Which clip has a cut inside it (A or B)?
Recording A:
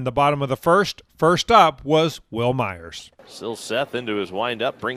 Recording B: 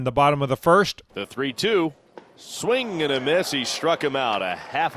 B